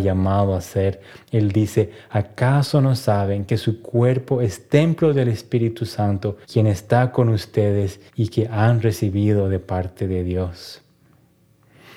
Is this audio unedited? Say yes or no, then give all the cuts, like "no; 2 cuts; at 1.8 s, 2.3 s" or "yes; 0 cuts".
no; 2 cuts; at 6.4 s, 8.1 s